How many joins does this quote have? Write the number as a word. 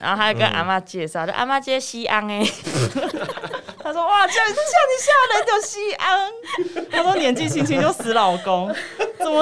zero